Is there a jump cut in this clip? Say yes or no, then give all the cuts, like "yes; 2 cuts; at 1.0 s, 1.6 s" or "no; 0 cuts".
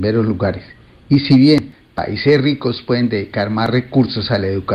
no; 0 cuts